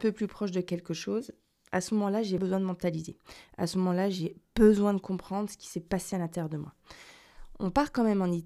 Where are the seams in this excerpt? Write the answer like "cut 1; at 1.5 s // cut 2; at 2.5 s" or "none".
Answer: cut 1; at 2.4 s